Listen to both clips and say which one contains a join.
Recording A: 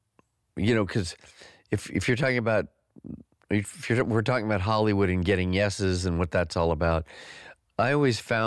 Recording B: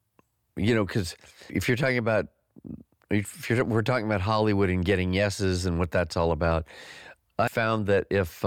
B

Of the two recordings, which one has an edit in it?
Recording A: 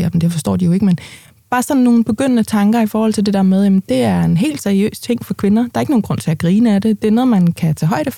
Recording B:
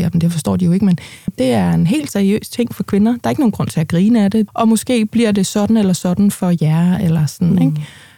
B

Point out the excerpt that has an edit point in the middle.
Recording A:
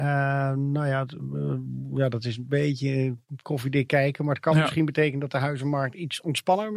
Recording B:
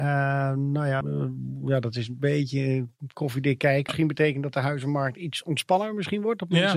B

